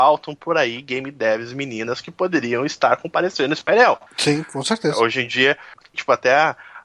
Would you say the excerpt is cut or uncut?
cut